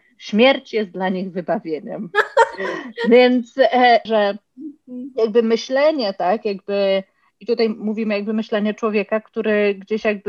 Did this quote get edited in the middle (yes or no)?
yes